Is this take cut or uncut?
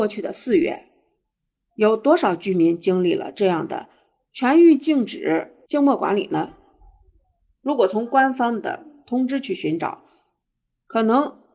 cut